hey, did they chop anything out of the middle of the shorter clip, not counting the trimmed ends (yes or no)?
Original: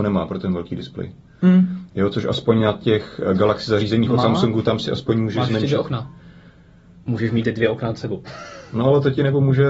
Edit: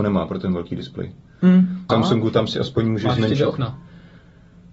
yes